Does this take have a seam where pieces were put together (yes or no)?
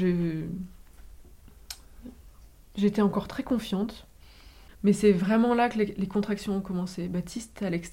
yes